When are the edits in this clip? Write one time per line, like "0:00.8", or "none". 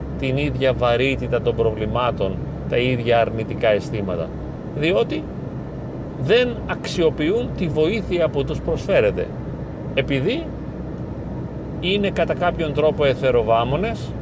0:02.7